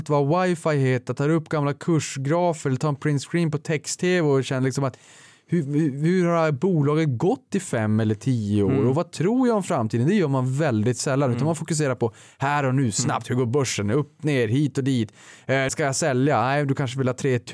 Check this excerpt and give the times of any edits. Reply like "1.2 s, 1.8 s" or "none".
15.7 s